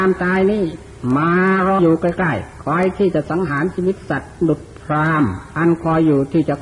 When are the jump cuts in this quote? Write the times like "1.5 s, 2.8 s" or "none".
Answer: 1.8 s